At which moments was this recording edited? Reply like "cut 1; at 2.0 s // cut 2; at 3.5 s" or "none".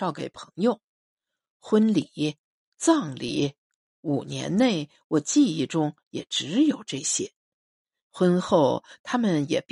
cut 1; at 8.0 s